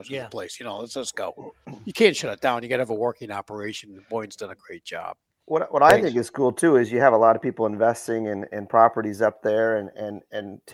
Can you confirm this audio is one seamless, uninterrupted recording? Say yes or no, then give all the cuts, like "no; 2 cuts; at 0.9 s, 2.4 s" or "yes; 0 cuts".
yes; 0 cuts